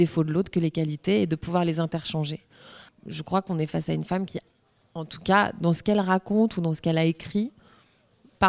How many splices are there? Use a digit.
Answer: 1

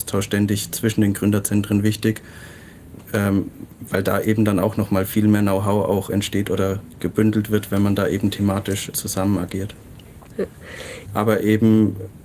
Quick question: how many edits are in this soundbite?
2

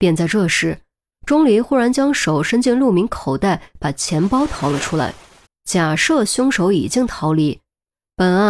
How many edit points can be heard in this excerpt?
1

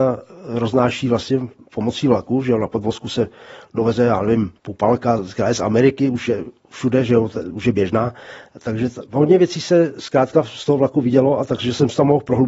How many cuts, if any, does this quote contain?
0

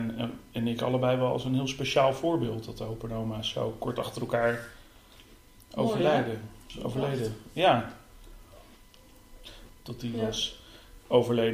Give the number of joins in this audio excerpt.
1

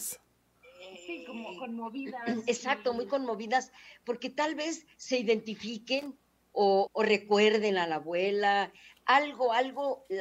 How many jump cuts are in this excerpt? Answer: 1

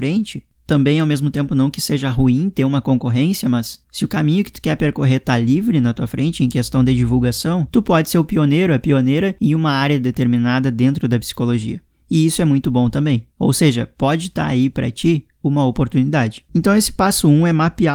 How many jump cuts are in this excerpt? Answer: 0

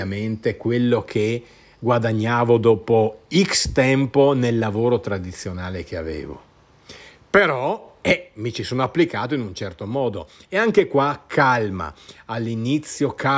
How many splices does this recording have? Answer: 0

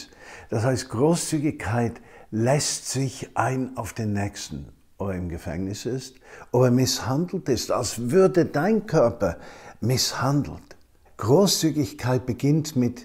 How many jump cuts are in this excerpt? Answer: 1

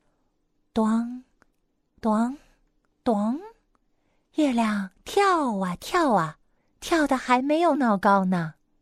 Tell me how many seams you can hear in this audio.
1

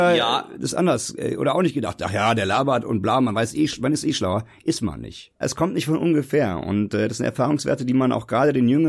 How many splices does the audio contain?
1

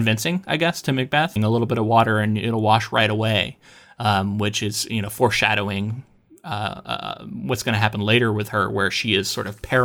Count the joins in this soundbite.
1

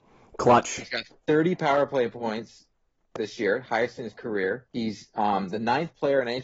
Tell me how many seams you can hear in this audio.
1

